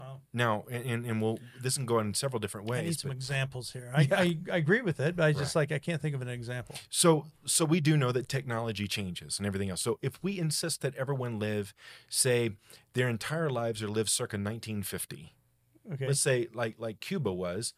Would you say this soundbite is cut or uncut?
uncut